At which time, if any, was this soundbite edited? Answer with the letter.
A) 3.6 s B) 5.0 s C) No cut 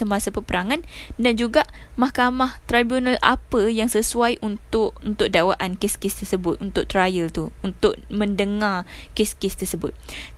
B